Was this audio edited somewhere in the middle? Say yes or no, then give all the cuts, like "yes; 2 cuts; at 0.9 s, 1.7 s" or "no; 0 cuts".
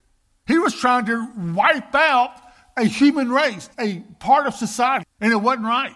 yes; 2 cuts; at 3.7 s, 5.0 s